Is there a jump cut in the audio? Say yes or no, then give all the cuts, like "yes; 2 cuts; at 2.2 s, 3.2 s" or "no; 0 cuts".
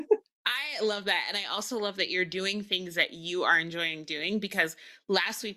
no; 0 cuts